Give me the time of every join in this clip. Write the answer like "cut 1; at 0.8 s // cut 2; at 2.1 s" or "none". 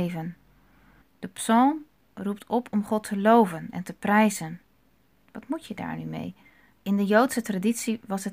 cut 1; at 1.0 s // cut 2; at 6.7 s